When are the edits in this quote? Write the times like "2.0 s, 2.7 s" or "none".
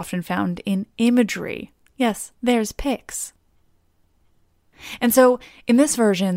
2.3 s